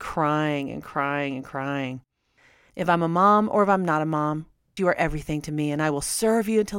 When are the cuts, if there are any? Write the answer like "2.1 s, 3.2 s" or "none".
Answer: 2.7 s, 4.8 s